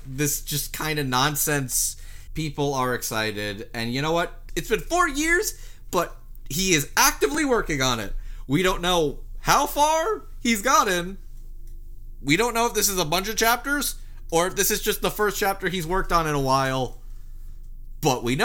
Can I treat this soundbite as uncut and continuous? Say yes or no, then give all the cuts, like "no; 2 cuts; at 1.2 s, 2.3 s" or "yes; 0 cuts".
no; 2 cuts; at 2.3 s, 4.5 s